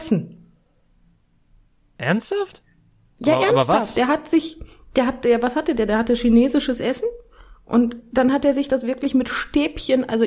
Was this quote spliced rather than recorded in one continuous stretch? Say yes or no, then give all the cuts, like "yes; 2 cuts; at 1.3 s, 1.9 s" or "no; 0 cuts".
no; 0 cuts